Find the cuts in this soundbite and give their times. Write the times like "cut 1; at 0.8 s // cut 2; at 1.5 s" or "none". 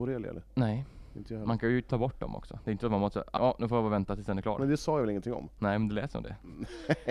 cut 1; at 3.4 s